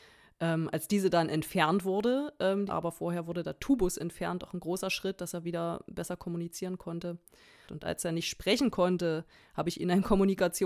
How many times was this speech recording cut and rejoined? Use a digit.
2